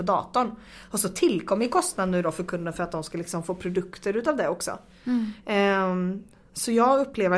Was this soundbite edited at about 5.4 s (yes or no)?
yes